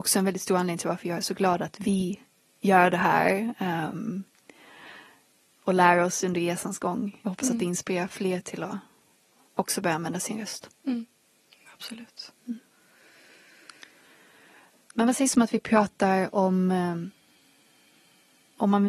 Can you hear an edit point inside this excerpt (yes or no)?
no